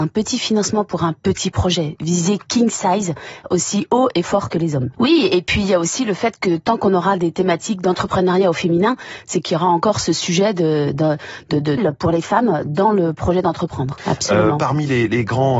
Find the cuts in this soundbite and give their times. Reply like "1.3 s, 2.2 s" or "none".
4.9 s, 11.8 s, 14.0 s